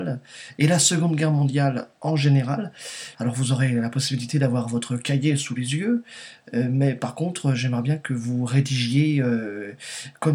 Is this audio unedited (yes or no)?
no